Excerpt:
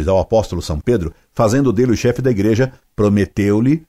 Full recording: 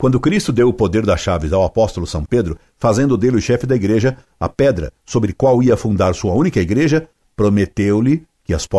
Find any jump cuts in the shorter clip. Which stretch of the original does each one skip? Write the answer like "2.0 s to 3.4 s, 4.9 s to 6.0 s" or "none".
4.3 s to 7.2 s